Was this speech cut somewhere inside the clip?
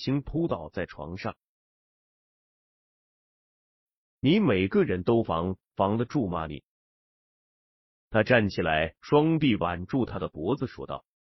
yes; 2 cuts; at 3.9 s, 9.0 s

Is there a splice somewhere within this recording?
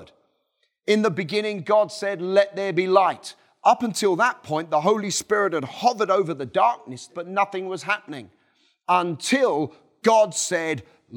yes; 1 cut; at 7.1 s

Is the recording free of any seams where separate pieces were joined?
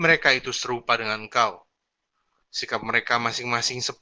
yes; 0 cuts

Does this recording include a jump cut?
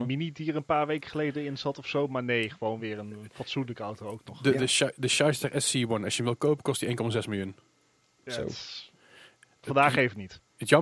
no; 0 cuts

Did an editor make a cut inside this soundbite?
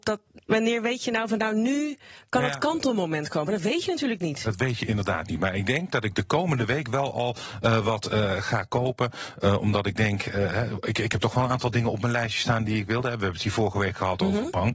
no; 0 cuts

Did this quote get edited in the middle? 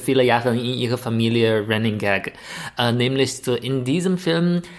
no; 0 cuts

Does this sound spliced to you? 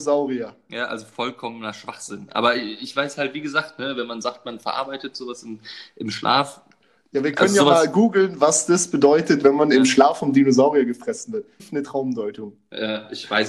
yes; 1 cut; at 11.6 s

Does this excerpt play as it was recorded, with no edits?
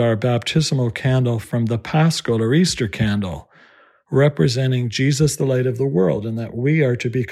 yes; 0 cuts

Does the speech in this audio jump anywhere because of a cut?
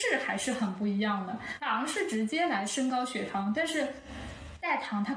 no; 0 cuts

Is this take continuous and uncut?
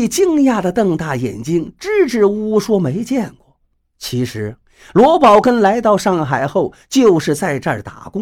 yes; 0 cuts

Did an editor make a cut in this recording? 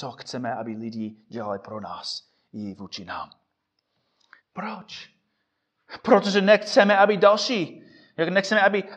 yes; 1 cut; at 4.4 s

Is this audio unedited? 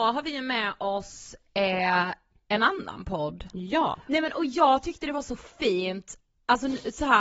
no; 1 cut; at 4.1 s

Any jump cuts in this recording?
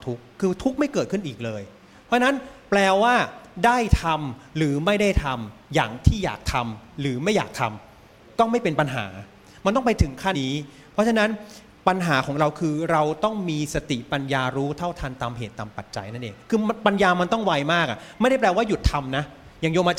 yes; 1 cut; at 10.3 s

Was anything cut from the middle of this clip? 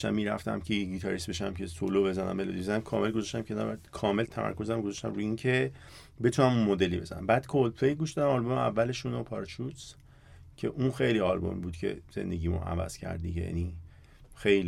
yes; 1 cut; at 4.2 s

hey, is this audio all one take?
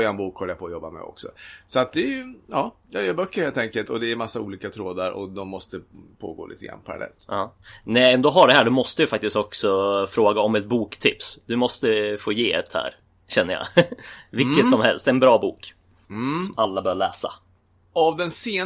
yes; 0 cuts

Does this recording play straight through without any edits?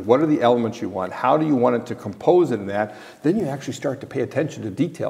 yes; 0 cuts

